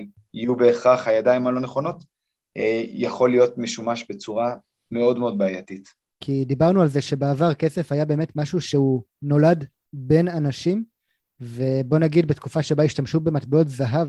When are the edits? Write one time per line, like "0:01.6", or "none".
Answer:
0:06.1